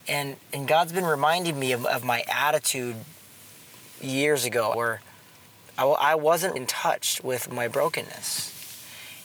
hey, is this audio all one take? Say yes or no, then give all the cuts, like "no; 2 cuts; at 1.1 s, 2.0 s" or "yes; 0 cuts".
no; 2 cuts; at 4.7 s, 6.6 s